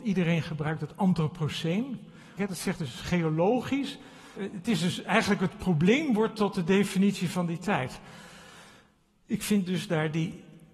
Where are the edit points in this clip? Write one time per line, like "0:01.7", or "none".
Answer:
0:02.4
0:04.4